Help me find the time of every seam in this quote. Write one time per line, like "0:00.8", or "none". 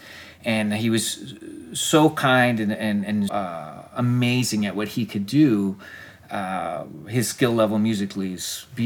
0:03.3